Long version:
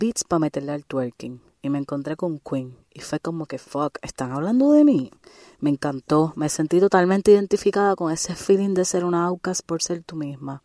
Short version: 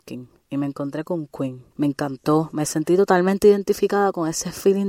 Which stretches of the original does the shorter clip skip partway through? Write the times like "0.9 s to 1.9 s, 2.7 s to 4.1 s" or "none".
2.8 s to 5.5 s